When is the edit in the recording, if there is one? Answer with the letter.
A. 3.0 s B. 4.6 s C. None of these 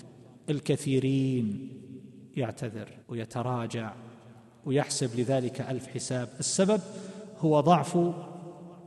A